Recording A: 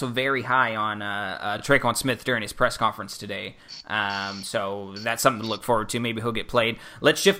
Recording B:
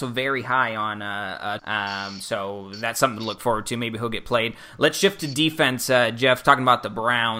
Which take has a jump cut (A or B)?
B